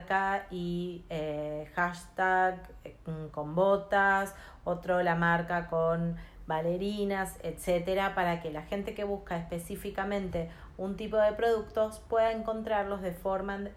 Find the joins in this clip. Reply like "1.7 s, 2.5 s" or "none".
none